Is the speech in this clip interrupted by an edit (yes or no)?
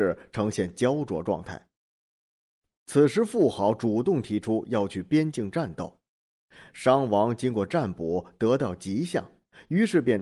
no